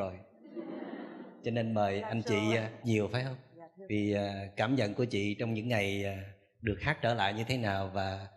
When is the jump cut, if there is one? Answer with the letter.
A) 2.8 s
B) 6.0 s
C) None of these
A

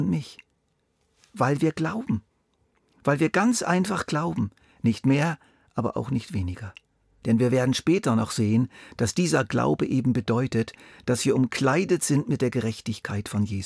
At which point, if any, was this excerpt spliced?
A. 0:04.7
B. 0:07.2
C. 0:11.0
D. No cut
B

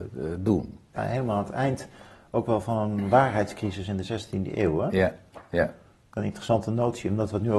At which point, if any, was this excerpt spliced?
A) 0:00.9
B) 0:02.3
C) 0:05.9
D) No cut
A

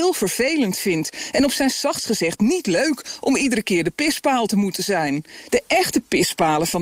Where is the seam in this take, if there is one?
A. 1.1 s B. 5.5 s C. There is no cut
B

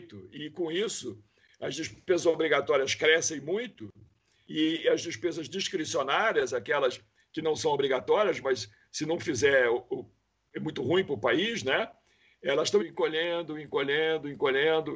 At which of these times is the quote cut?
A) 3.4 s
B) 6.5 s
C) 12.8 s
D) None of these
C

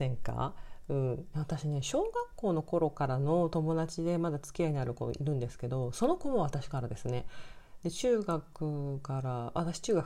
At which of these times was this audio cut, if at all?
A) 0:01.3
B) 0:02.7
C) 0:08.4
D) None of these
A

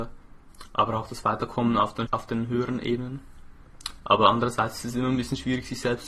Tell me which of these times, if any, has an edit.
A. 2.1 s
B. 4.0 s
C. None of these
A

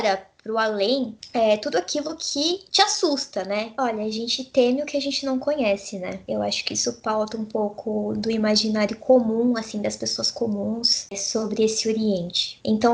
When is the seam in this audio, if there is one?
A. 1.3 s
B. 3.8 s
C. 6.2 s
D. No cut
B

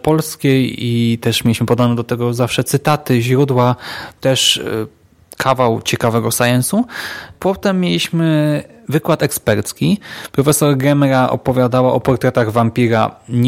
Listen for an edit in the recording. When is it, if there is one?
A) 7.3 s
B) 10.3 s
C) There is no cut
C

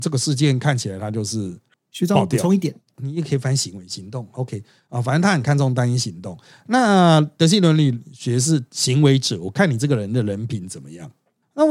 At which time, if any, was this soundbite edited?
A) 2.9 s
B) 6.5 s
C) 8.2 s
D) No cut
A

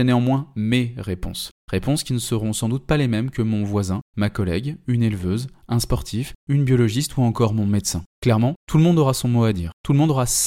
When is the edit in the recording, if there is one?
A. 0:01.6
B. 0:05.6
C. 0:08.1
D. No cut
D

